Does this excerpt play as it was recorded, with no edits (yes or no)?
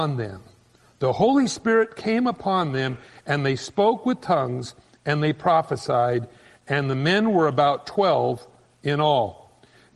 yes